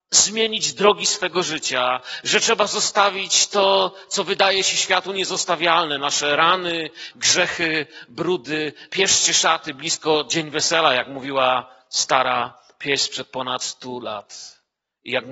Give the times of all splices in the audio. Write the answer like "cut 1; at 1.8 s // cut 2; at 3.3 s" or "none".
cut 1; at 7.1 s // cut 2; at 8.9 s